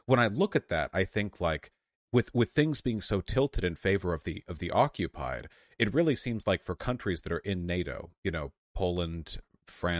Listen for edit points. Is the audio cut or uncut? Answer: uncut